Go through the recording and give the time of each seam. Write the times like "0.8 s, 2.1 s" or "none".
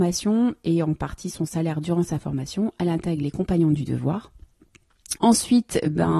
5.2 s